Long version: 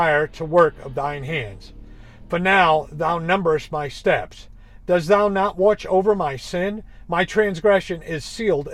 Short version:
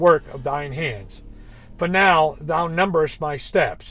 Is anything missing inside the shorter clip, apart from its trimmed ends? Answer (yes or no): no